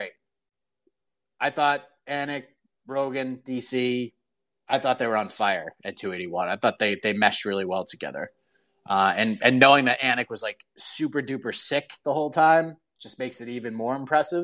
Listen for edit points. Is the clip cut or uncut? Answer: uncut